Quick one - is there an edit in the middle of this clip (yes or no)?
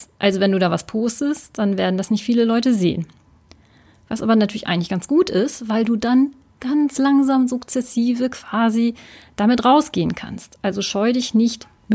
no